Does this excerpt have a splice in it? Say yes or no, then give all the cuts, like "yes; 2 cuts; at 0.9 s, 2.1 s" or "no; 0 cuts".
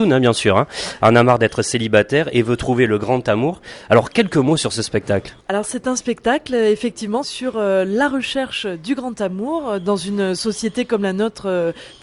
yes; 2 cuts; at 5.4 s, 7.2 s